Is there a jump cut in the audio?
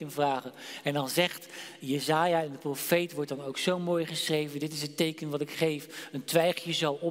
no; 0 cuts

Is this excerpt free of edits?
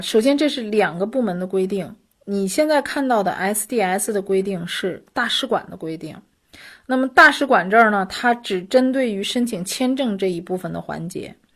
yes; 0 cuts

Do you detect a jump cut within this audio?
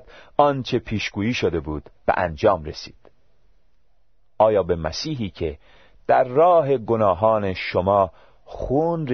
yes; 1 cut; at 2.0 s

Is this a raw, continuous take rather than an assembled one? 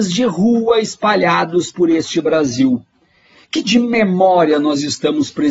no; 1 cut; at 3.6 s

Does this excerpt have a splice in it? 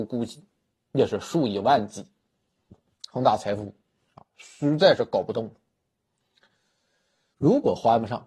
yes; 1 cut; at 7.3 s

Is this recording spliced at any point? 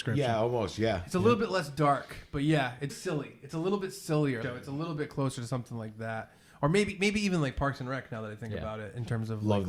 yes; 2 cuts; at 2.9 s, 4.4 s

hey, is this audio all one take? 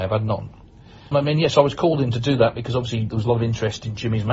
no; 1 cut; at 1.1 s

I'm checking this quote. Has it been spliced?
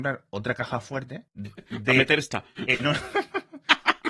yes; 1 cut; at 1.3 s

